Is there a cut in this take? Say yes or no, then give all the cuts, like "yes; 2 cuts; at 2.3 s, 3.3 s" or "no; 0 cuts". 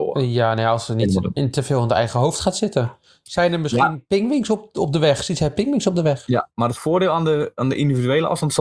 no; 0 cuts